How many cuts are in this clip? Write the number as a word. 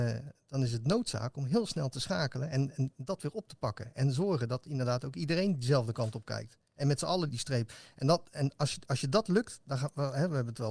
one